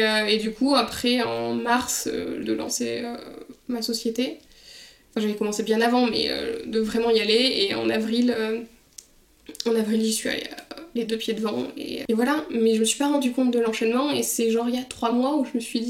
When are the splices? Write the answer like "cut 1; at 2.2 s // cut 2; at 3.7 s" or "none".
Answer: cut 1; at 2.4 s // cut 2; at 12.1 s